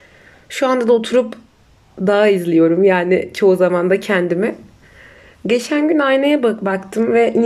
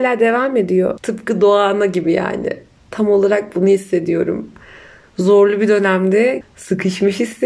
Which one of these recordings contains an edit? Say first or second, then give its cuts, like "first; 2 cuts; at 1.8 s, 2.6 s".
second; 2 cuts; at 1.0 s, 6.4 s